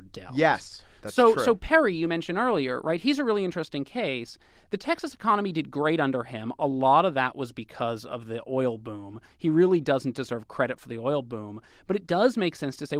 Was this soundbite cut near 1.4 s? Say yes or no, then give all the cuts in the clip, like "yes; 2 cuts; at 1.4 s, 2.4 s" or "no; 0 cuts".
no; 0 cuts